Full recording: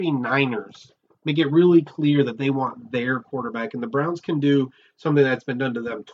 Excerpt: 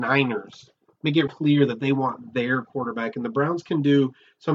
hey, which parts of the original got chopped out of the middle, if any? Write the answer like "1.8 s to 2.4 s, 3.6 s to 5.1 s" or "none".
1.5 s to 1.8 s